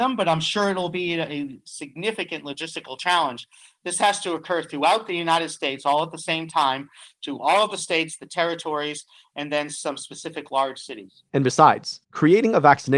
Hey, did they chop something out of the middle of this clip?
yes; 1 cut; at 12.0 s

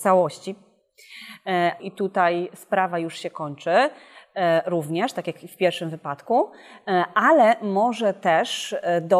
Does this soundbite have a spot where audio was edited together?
yes; 1 cut; at 1.8 s

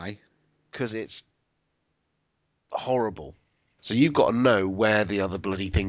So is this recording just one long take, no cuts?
no; 1 cut; at 3.8 s

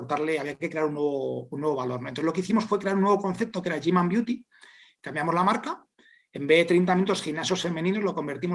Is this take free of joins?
yes; 0 cuts

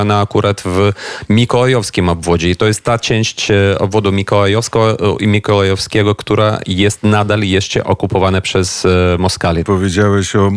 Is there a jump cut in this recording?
yes; 1 cut; at 9.7 s

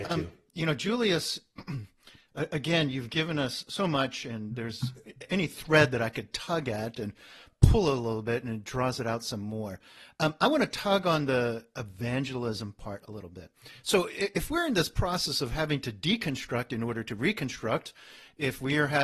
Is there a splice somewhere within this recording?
no; 0 cuts

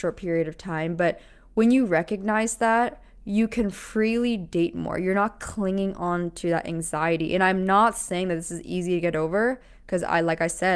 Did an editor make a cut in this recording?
no; 0 cuts

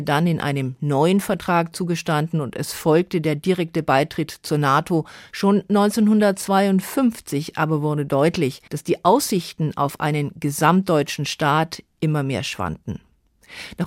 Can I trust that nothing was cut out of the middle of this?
no; 2 cuts; at 5.3 s, 8.7 s

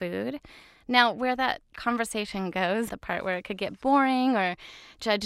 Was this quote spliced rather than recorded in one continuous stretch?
yes; 1 cut; at 2.9 s

